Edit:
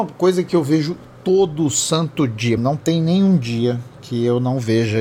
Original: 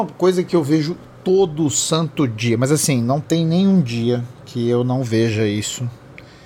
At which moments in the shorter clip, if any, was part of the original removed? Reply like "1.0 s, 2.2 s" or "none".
2.6 s